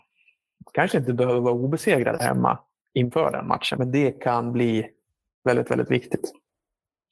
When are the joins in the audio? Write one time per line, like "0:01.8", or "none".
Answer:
0:03.7